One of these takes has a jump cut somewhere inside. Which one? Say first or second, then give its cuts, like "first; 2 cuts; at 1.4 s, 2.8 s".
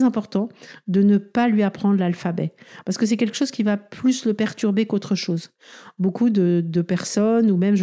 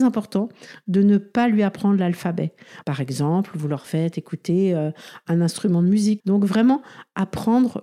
second; 2 cuts; at 2.8 s, 6.2 s